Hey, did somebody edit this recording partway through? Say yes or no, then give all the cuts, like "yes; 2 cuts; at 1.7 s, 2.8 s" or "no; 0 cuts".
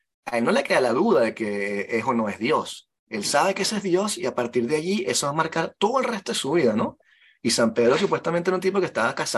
no; 0 cuts